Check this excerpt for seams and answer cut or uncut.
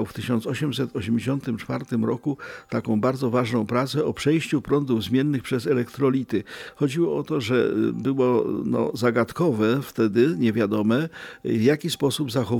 uncut